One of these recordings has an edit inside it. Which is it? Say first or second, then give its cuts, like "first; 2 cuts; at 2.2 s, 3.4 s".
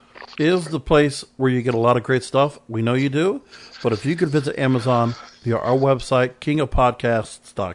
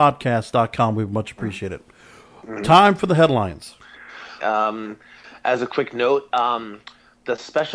second; 1 cut; at 4.4 s